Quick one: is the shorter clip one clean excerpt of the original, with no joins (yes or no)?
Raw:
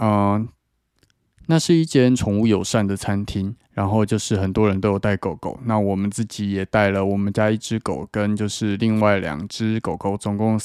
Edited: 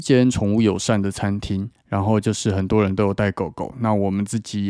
yes